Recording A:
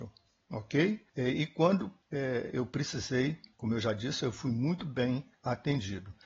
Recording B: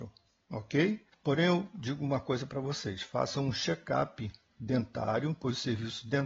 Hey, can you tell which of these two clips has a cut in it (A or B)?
B